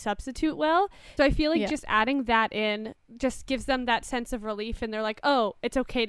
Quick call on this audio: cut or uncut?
cut